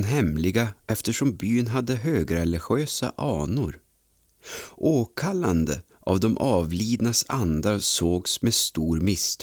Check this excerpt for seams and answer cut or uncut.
uncut